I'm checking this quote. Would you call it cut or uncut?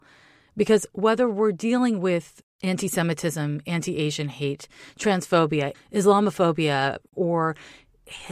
cut